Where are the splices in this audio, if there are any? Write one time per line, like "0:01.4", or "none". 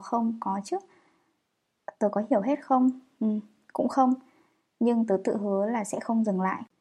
none